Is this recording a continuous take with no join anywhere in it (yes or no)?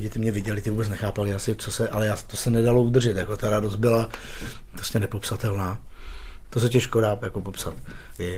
no